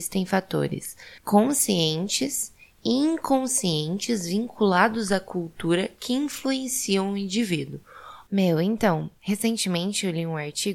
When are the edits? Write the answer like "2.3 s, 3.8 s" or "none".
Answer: 1.2 s, 8.3 s